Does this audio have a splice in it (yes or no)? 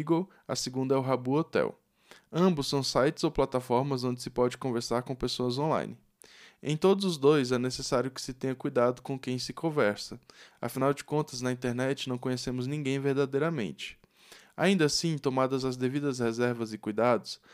no